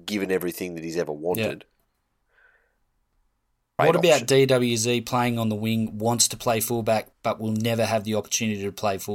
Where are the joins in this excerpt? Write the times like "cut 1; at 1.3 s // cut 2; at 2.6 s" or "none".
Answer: cut 1; at 3.8 s